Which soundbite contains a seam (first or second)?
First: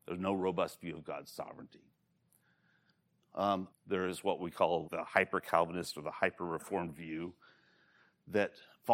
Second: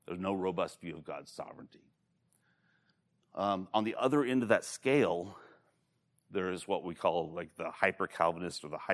first